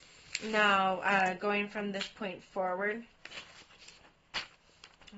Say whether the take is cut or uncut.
uncut